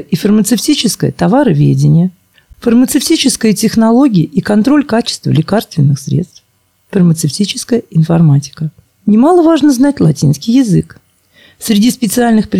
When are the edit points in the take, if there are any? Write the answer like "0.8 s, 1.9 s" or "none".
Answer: 2.5 s, 8.8 s